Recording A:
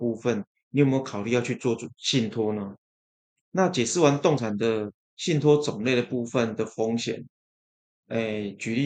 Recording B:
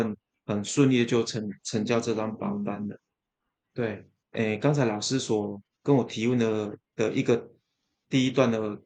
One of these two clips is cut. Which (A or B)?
B